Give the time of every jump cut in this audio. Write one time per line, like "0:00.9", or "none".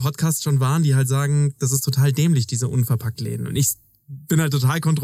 none